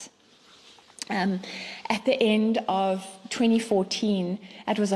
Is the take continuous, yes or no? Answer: yes